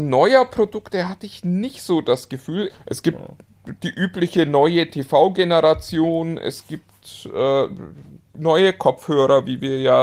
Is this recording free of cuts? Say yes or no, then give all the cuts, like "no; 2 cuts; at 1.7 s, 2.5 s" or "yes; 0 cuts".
no; 1 cut; at 2.7 s